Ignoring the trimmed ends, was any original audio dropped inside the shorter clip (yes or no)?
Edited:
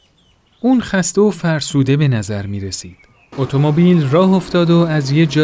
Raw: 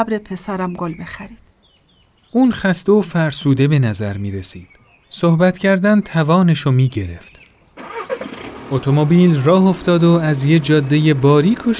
yes